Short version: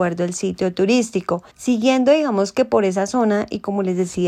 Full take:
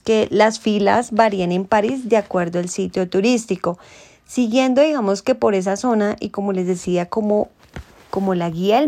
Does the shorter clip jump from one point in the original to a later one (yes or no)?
yes